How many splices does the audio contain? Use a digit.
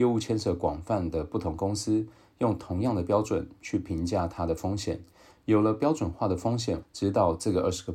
1